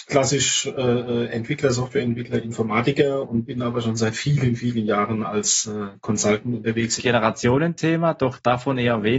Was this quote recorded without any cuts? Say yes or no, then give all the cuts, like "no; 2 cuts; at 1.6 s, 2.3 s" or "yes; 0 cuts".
no; 1 cut; at 7.0 s